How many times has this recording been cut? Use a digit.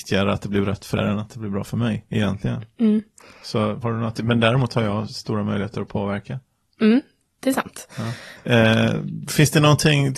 3